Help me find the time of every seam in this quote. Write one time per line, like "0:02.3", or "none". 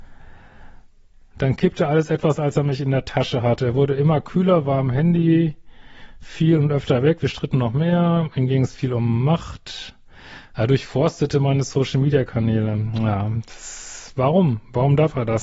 none